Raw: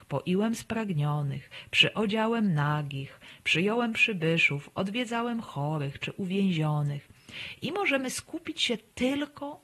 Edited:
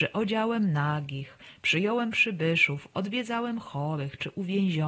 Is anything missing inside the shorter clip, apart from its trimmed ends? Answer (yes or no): no